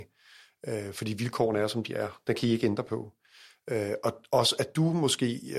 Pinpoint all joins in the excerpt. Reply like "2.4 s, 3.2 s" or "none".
none